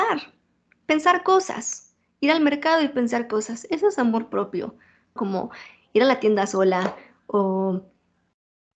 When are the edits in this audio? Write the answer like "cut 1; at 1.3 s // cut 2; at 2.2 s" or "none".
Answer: cut 1; at 5.2 s